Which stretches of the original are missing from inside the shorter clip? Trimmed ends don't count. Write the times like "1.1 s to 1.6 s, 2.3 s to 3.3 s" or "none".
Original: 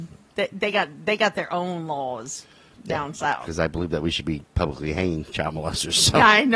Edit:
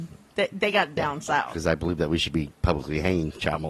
1.0 s to 2.9 s